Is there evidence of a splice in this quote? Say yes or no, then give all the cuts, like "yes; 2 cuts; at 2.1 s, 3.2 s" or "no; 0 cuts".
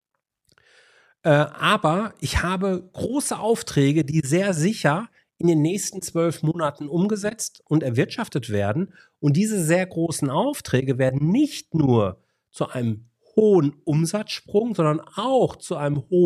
no; 0 cuts